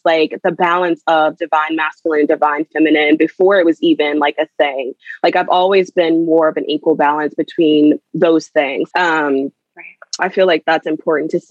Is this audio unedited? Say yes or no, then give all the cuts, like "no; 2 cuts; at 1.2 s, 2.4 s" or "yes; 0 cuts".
no; 2 cuts; at 8.9 s, 10.2 s